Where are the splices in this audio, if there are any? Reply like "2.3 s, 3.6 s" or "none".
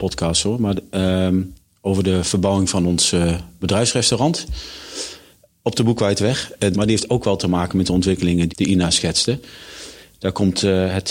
6.7 s, 8.5 s

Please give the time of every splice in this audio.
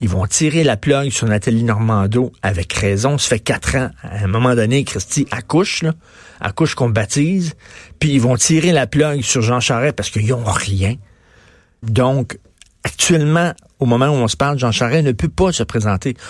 11.8 s

